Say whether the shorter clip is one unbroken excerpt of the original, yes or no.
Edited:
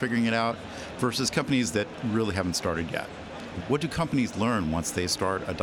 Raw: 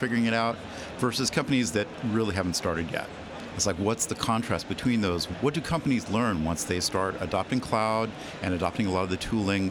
no